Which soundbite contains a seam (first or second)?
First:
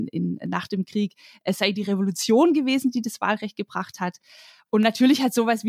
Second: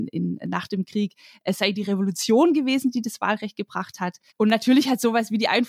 second